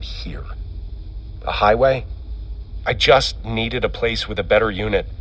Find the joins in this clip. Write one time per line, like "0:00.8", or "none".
0:01.4
0:02.8